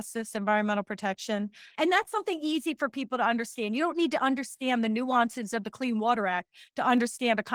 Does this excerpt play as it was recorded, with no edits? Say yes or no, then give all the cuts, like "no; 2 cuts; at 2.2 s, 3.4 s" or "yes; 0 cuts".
no; 1 cut; at 1.8 s